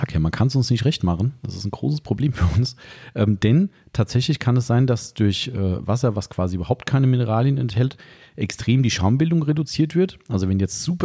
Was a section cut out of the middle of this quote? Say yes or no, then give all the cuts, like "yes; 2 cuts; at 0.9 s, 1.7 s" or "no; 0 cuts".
no; 0 cuts